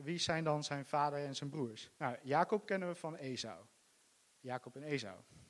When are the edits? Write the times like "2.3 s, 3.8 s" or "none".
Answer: 1.9 s

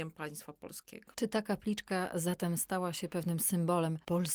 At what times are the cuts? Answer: 1.1 s

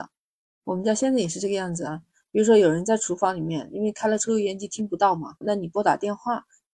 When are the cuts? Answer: 5.4 s

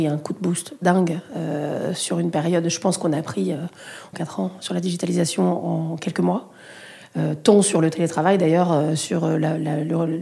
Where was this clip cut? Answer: 4.1 s

